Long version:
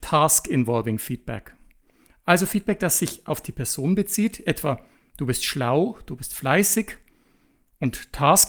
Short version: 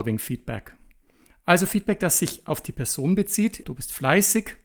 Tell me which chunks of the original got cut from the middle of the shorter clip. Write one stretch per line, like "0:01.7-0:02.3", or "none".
0:04.4-0:06.0